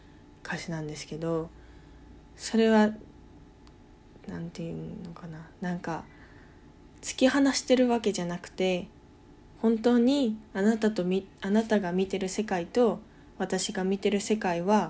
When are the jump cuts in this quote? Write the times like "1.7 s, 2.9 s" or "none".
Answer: none